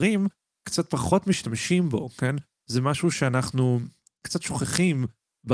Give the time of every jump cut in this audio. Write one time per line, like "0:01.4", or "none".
none

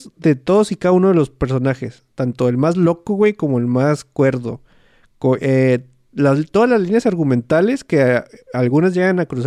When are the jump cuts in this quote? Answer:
none

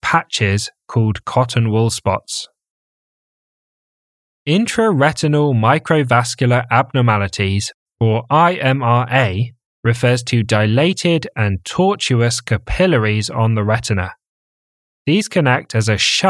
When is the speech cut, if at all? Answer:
none

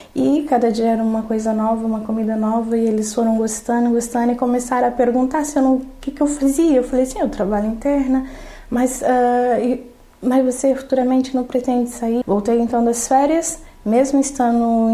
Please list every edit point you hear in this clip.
0:12.2

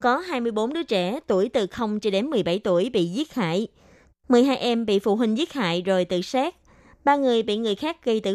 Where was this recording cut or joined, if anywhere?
0:04.1

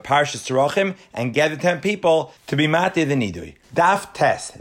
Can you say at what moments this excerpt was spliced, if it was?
0:03.6

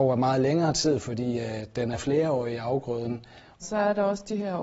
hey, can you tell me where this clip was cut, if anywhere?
0:03.6

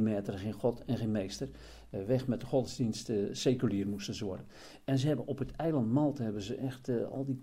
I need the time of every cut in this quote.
none

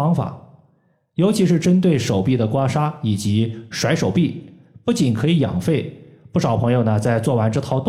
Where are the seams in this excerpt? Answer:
none

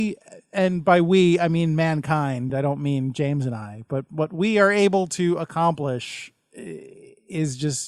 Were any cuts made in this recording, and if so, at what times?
none

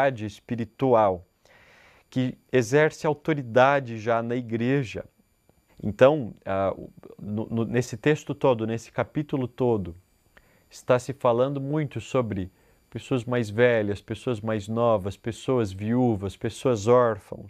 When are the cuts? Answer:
0:05.7

